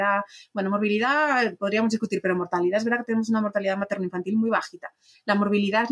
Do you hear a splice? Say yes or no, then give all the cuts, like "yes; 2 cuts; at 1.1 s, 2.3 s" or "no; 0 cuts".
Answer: no; 0 cuts